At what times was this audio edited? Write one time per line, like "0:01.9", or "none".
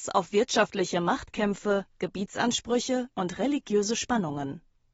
none